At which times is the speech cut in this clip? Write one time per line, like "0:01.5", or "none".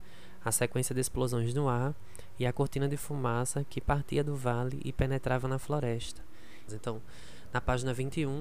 0:06.7